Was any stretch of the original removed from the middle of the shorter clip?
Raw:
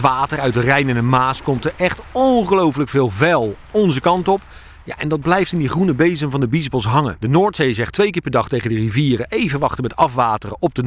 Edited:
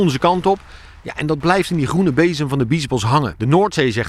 no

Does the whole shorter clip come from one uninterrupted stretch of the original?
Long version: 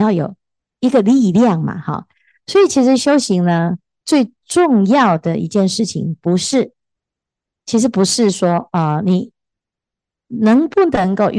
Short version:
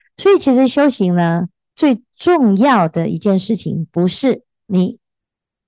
no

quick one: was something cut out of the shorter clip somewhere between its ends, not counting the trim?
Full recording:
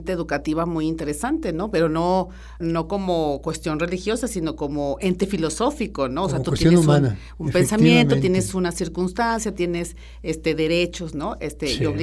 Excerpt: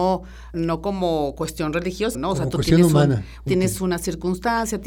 yes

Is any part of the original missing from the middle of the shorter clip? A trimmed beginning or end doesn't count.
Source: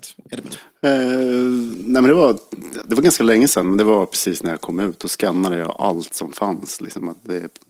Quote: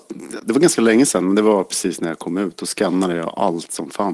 no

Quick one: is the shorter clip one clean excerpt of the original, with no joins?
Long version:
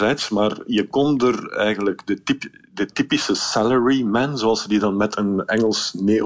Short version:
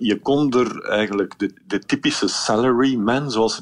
no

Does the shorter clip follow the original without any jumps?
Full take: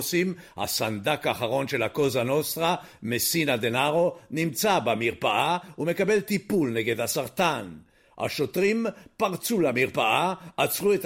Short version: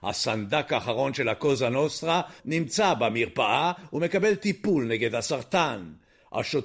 no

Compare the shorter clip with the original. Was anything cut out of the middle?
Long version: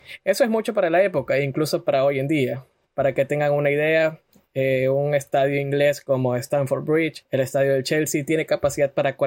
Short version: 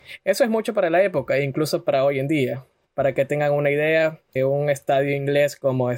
yes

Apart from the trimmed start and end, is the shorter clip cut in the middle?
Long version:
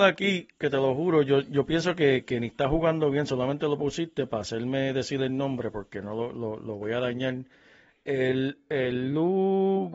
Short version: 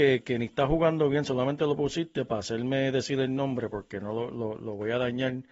no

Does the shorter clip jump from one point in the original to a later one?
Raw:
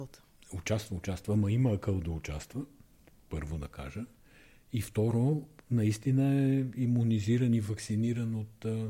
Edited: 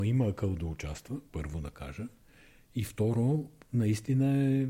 yes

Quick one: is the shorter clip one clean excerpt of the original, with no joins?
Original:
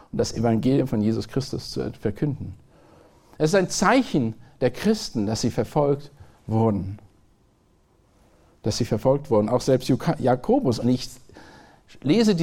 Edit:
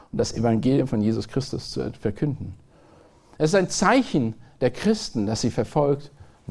yes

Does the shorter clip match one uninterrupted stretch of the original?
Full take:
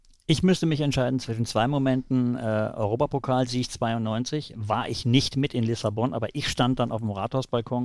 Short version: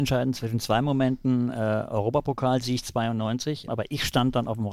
no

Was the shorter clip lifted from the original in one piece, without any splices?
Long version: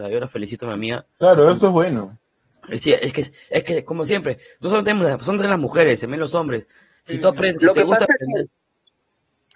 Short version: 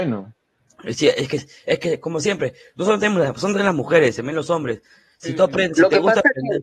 yes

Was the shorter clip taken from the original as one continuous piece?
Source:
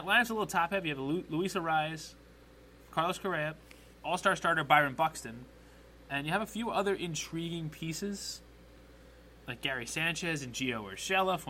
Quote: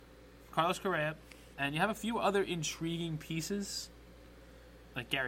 no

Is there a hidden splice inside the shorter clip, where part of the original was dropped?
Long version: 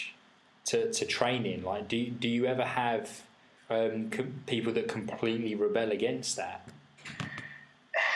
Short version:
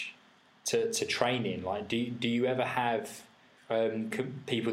no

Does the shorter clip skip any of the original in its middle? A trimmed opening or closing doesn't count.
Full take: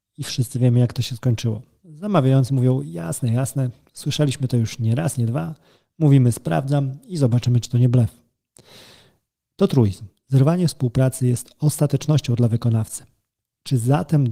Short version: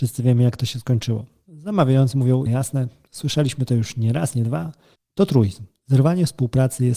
yes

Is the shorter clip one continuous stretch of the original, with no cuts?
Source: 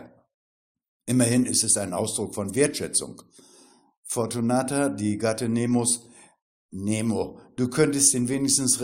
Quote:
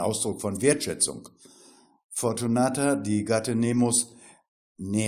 yes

